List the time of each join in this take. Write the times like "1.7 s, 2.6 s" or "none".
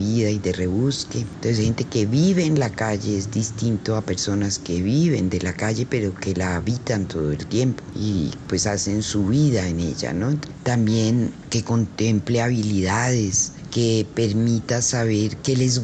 1.3 s, 13.7 s